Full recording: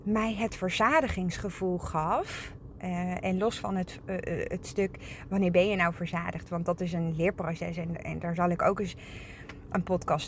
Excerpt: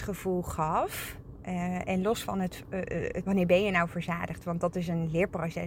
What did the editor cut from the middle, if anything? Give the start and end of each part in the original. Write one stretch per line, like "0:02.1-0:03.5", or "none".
0:04.6-0:05.3